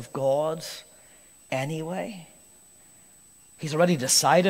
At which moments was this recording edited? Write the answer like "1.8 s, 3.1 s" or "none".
3.5 s